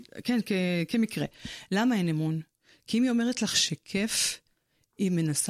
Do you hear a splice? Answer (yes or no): no